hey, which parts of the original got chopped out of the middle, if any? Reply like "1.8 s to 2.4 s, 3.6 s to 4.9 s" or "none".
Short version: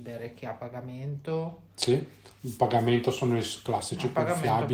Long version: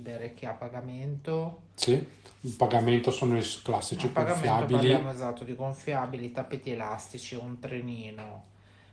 none